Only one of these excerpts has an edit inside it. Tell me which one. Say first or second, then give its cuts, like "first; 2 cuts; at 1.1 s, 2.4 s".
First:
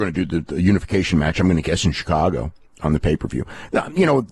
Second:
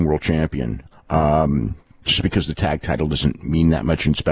second; 1 cut; at 0.9 s